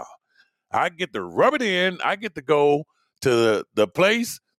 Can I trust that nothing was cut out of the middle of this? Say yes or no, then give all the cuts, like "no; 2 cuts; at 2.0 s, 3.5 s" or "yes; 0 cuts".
yes; 0 cuts